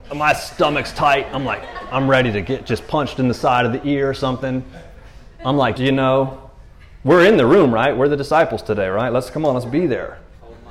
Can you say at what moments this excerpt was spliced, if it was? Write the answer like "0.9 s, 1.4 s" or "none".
5.8 s

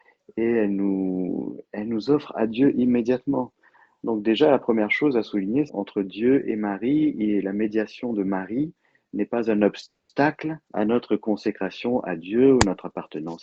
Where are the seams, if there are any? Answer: 5.7 s, 10.6 s

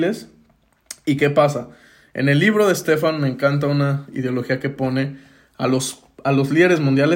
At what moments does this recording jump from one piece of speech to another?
none

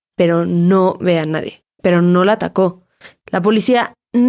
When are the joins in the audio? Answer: 1.8 s, 3.2 s

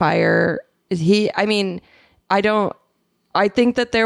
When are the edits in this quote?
none

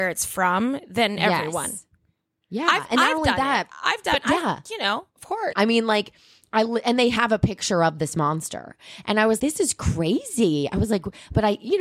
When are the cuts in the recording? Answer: 5.5 s, 9.4 s

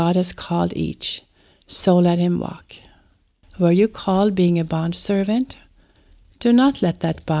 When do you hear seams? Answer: 3.4 s

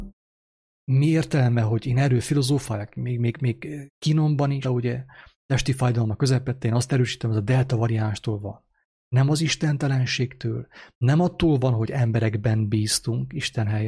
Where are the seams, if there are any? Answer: 4.6 s

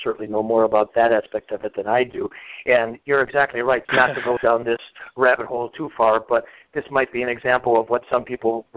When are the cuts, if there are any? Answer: 3.8 s

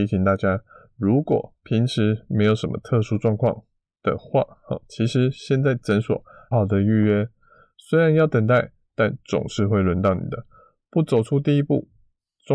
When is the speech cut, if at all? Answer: 6.5 s

